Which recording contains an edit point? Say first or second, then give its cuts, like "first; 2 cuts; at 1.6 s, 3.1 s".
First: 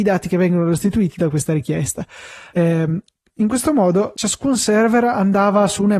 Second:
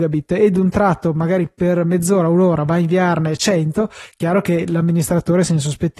first; 2 cuts; at 2.5 s, 4.1 s